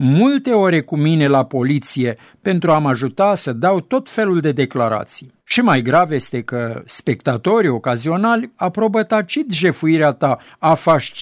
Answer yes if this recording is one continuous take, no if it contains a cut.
no